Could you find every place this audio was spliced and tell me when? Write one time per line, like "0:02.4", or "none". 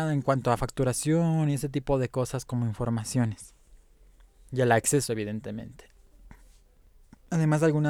none